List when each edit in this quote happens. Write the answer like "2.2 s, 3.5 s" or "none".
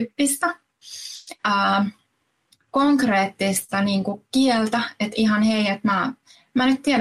1.4 s